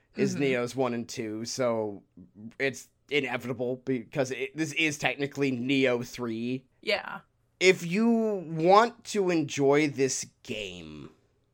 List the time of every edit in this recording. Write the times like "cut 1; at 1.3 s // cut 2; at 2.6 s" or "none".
cut 1; at 6.7 s